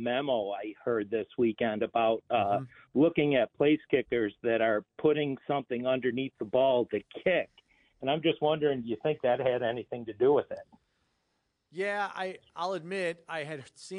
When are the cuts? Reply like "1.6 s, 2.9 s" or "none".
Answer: none